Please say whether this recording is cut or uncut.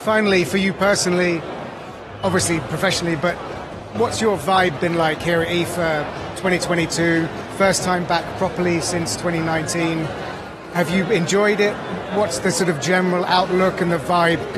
uncut